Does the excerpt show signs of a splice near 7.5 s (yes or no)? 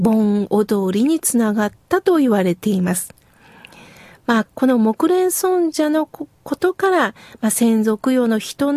no